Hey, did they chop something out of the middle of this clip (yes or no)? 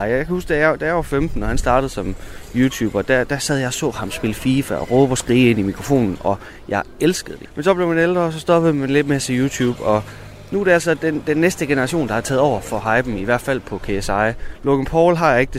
yes